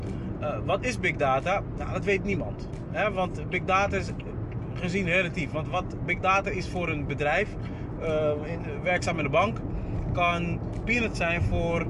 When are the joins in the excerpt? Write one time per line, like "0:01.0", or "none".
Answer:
none